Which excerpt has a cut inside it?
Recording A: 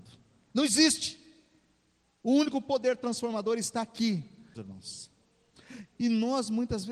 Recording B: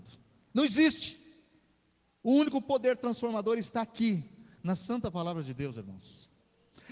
A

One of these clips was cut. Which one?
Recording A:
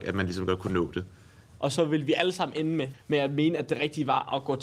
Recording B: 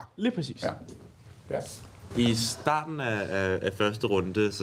A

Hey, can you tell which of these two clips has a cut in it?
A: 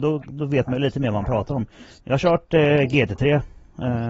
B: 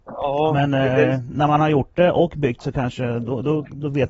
A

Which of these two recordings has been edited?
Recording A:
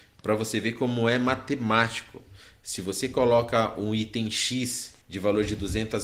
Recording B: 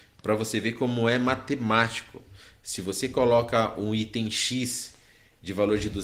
A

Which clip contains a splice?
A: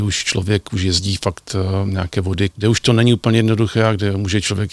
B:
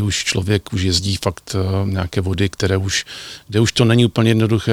A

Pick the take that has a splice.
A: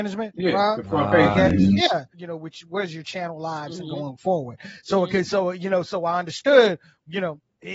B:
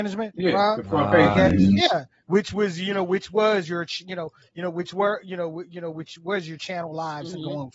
A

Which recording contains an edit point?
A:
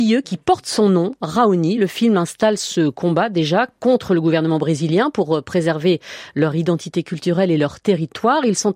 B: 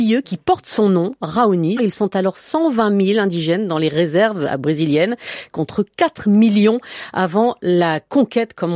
B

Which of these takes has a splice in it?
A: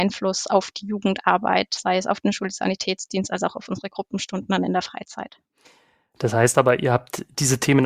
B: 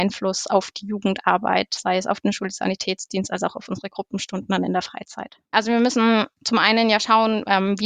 B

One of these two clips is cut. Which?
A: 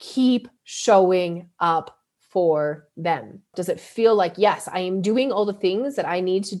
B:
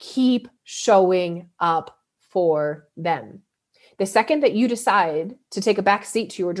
A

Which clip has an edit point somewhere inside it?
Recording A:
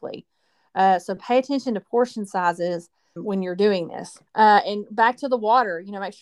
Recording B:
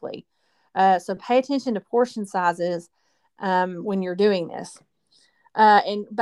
A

